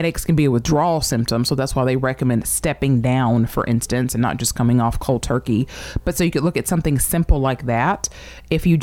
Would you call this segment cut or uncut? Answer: uncut